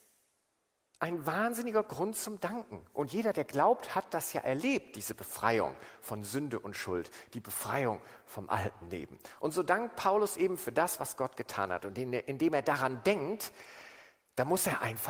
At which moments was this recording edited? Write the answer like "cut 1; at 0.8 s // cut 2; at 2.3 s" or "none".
cut 1; at 11.8 s